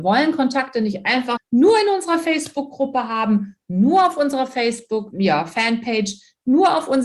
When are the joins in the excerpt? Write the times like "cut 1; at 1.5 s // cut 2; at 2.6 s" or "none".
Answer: cut 1; at 1.4 s // cut 2; at 5.1 s